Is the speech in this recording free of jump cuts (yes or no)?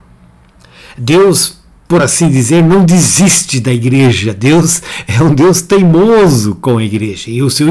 yes